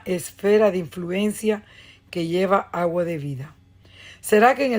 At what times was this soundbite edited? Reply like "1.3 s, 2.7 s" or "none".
none